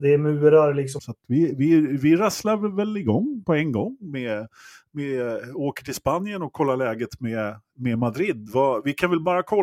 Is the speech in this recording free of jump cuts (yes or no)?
no